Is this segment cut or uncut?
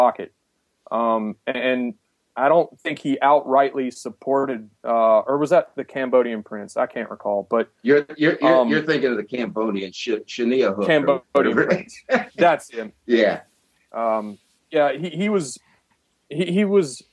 uncut